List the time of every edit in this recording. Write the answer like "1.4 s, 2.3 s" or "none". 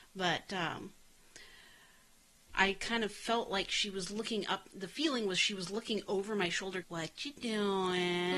2.5 s, 6.8 s